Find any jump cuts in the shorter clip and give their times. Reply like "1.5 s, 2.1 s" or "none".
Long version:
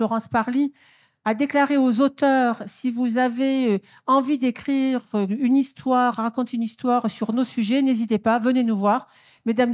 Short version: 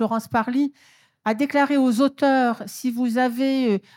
none

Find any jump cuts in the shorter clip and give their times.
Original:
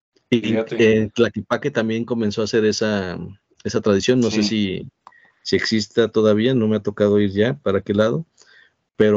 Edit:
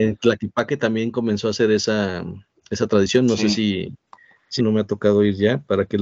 4.6 s

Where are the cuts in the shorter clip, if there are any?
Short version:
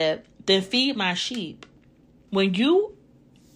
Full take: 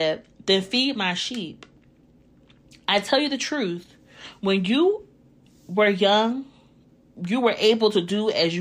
2.3 s

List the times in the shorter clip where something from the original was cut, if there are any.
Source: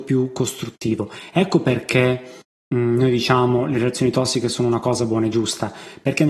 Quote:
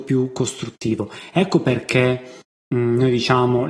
none

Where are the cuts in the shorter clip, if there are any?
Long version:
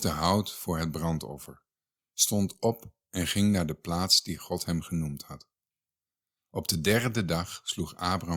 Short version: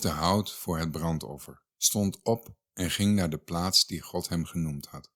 1.7 s

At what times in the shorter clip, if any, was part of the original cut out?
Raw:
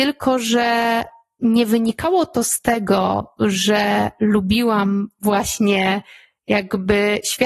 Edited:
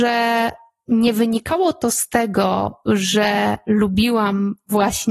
none

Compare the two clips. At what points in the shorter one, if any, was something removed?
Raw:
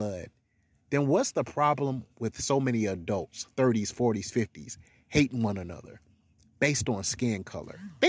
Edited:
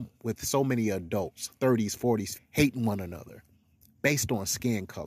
2.3 s

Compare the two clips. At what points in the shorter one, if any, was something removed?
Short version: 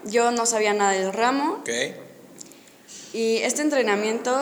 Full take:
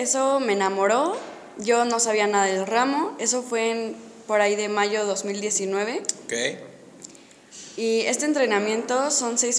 1.6 s

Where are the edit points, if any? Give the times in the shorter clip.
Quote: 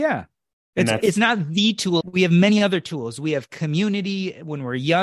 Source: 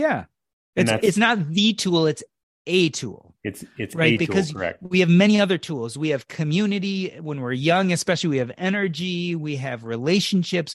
2.0 s

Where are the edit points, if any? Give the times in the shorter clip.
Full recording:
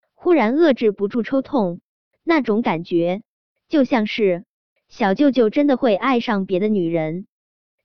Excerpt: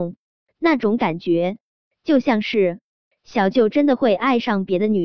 3.5 s

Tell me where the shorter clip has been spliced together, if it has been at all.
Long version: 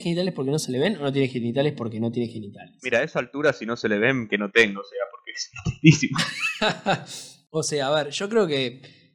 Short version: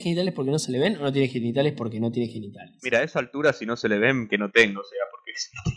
none

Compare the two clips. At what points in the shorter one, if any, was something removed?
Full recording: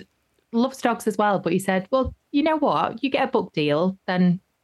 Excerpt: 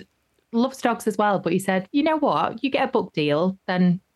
1.9 s

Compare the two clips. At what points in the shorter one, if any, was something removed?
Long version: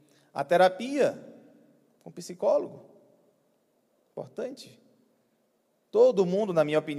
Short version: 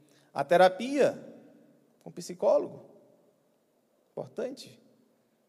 none

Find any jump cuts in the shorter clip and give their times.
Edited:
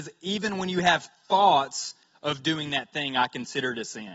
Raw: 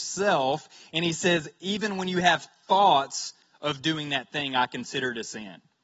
none

